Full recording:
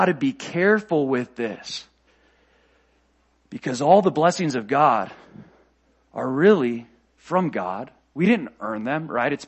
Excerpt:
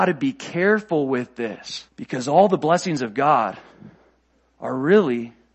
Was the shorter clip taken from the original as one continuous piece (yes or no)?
no